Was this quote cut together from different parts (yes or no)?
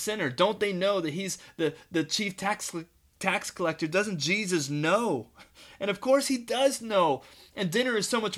no